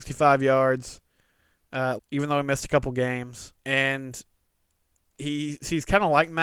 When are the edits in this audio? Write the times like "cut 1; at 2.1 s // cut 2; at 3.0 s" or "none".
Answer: cut 1; at 2.0 s // cut 2; at 3.6 s